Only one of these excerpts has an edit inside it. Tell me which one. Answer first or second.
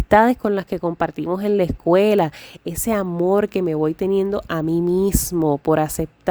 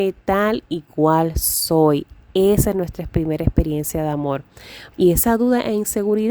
second